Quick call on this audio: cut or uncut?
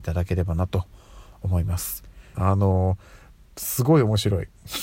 cut